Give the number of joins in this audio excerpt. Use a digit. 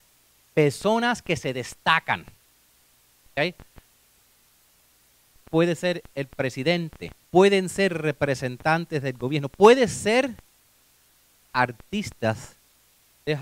1